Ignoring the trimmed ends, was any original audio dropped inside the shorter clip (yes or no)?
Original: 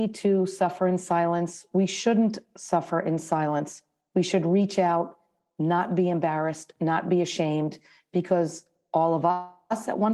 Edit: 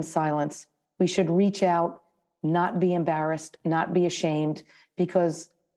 no